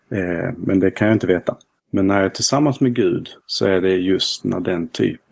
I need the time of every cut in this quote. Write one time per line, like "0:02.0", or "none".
0:01.8
0:03.4